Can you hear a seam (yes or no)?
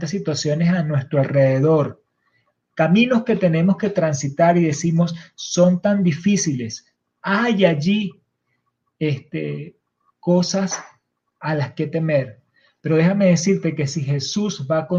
no